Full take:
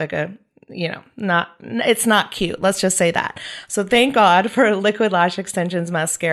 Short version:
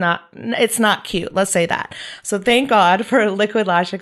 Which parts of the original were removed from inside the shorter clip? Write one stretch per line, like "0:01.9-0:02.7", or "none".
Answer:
0:02.8-0:02.9

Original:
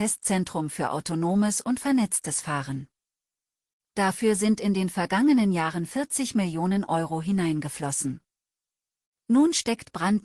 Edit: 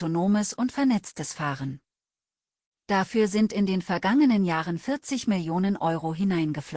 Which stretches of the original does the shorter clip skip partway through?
none

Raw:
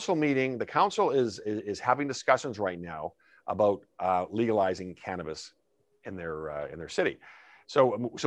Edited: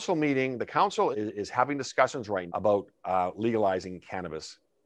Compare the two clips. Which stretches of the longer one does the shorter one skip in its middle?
0:01.1-0:01.4
0:02.8-0:03.4

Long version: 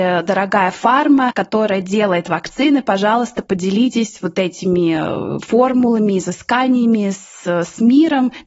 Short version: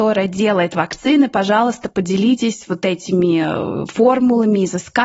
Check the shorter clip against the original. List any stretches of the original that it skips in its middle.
none

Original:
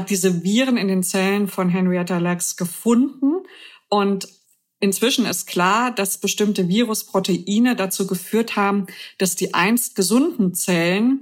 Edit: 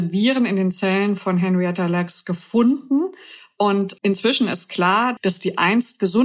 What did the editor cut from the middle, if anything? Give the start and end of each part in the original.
0:04.3-0:04.8
0:05.9-0:09.1

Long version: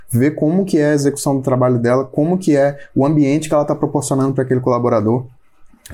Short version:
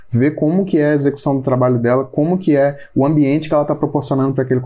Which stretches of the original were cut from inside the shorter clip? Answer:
none

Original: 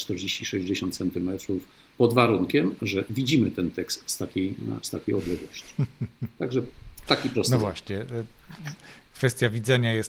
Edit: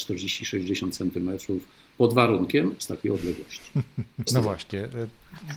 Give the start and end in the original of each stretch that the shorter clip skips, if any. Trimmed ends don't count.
0:02.8-0:04.8
0:06.3-0:07.4

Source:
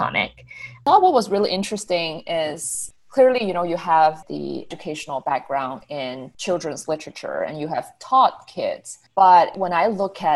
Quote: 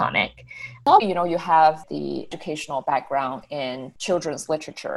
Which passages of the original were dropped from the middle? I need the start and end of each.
0:01.0-0:03.4

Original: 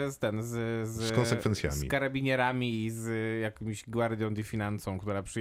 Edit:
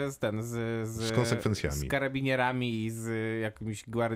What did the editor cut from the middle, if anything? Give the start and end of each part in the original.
none

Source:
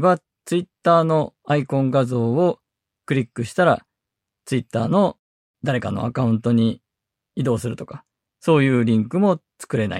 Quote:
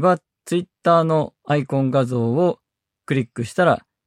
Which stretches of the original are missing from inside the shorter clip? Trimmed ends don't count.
none

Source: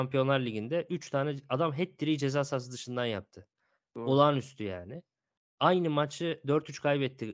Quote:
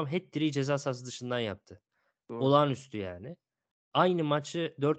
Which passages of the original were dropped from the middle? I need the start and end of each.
none

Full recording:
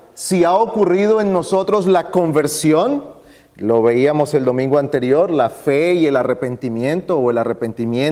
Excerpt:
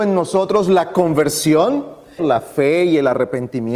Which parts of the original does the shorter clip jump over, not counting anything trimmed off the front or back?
0:03.4-0:05.3

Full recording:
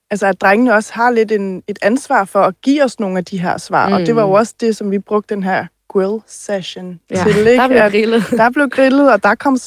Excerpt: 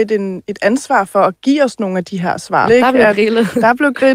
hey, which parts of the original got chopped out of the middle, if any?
0:03.9-0:07.4

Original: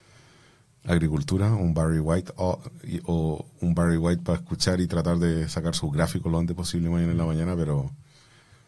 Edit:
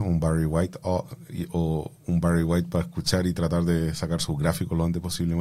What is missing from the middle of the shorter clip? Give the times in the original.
none

